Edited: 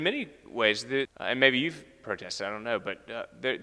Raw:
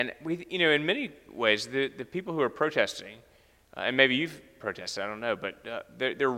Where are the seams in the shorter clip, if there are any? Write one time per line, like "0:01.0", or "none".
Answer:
0:01.1